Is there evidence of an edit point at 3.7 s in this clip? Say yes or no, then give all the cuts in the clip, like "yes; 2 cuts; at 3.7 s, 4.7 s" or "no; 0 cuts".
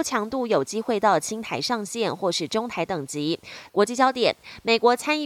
yes; 1 cut; at 3.7 s